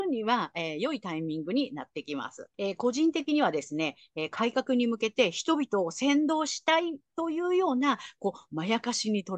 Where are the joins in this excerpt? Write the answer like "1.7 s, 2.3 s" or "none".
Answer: 2.5 s